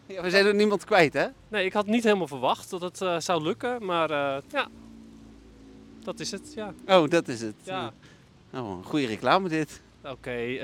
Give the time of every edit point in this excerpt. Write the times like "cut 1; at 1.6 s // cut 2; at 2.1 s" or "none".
cut 1; at 4.4 s